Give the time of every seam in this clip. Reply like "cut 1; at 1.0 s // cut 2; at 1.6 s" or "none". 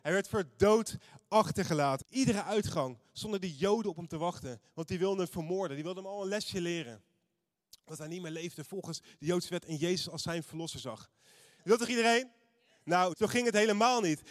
cut 1; at 2.0 s // cut 2; at 11.6 s // cut 3; at 13.1 s